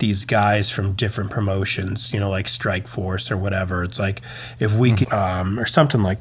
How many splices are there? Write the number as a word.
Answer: one